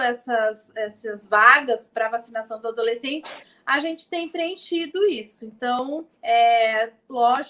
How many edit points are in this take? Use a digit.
1